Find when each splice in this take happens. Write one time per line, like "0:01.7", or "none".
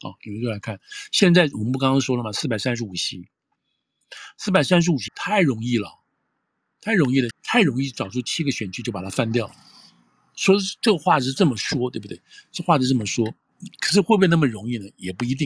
0:05.1
0:07.3